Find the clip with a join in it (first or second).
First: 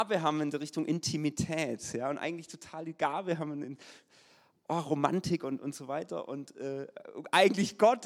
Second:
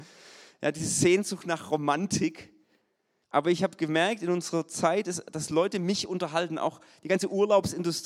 second